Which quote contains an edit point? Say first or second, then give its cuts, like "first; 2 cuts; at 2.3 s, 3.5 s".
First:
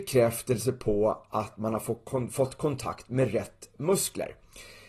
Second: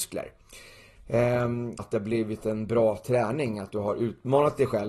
second; 1 cut; at 1.8 s